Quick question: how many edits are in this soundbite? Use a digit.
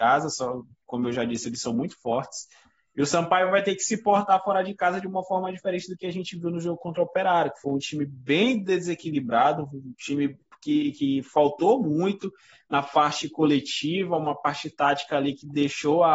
0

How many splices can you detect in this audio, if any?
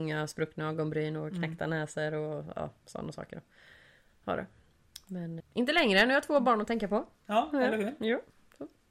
1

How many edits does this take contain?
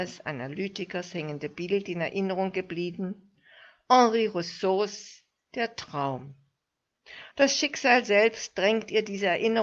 1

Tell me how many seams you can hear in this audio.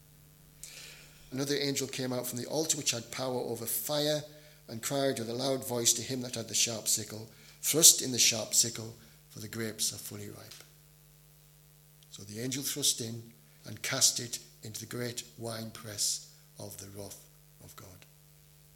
3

